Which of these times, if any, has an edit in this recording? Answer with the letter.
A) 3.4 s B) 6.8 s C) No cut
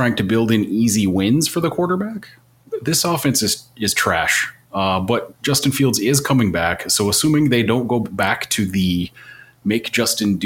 C